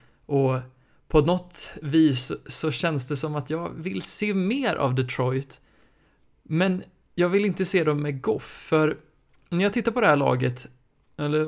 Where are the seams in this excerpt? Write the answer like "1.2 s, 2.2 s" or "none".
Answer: none